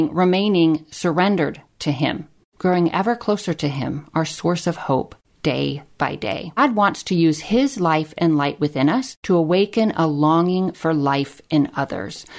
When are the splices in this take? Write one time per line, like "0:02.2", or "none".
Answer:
0:06.6